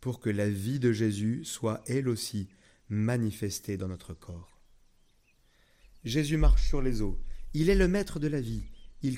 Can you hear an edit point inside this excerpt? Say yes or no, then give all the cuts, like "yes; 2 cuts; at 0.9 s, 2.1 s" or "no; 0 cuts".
no; 0 cuts